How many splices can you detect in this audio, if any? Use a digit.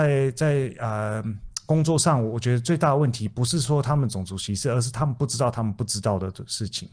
0